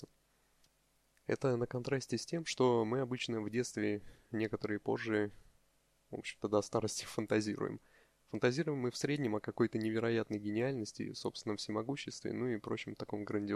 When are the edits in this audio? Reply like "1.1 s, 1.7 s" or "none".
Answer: none

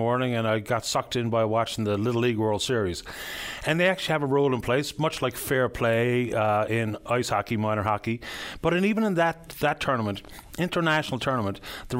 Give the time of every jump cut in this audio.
none

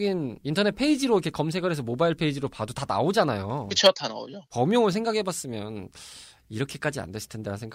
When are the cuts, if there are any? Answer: none

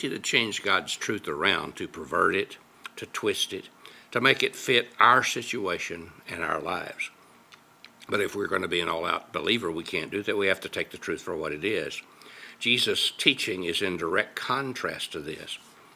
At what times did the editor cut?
none

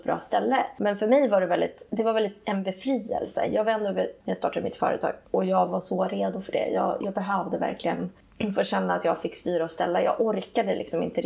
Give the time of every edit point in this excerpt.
4.2 s

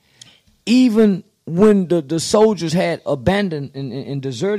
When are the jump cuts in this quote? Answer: 3.1 s

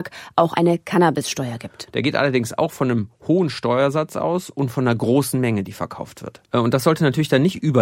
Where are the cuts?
1.9 s, 6.5 s

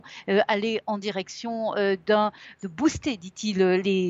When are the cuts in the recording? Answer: none

